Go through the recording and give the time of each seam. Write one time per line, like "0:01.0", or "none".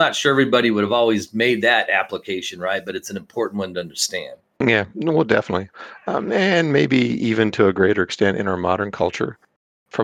none